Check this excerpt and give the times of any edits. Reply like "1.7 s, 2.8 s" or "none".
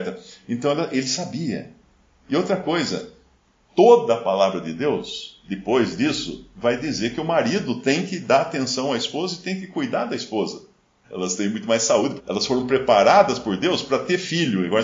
11.0 s, 12.2 s